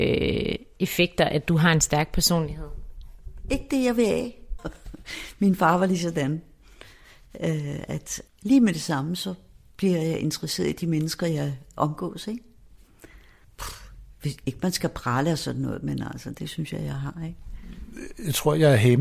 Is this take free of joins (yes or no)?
no